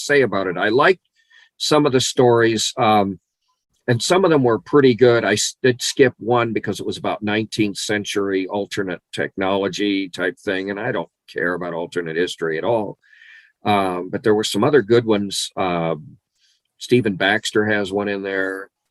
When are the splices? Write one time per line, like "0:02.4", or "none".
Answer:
none